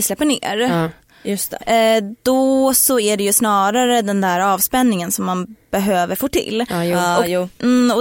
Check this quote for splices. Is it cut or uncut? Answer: uncut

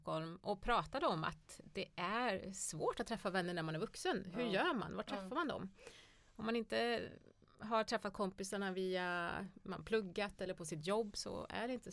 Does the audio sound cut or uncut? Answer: uncut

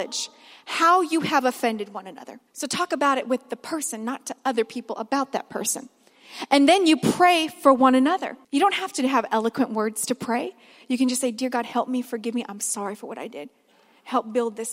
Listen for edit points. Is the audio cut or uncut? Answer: cut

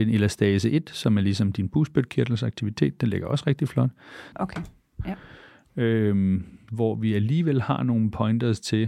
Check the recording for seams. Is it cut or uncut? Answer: cut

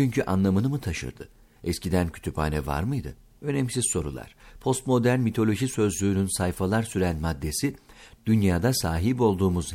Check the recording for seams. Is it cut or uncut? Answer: uncut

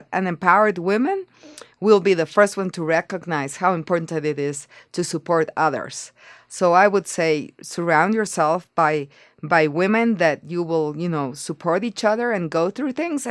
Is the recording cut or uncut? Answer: uncut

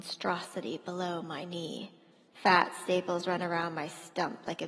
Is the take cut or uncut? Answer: cut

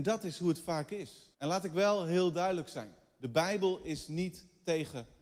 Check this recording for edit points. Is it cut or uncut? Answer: cut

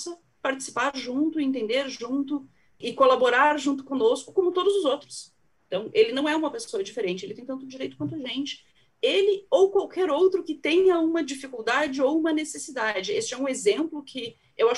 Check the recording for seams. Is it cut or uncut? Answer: cut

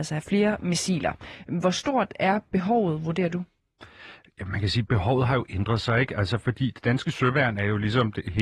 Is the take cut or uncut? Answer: uncut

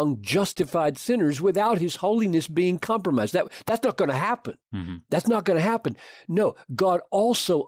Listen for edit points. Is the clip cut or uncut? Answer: uncut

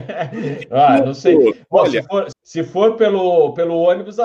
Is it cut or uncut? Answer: cut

